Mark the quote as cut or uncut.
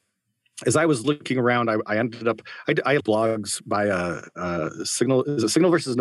cut